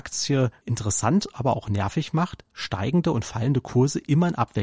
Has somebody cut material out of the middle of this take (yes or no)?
no